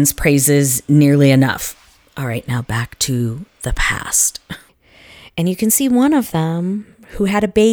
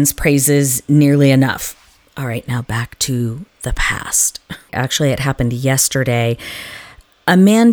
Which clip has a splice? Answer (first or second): second